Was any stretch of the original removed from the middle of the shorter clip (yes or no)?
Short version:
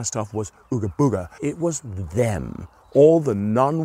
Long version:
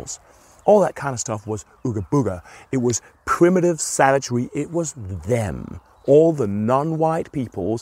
yes